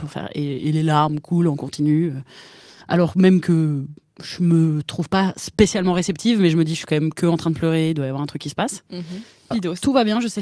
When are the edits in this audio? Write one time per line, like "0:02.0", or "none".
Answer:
0:09.5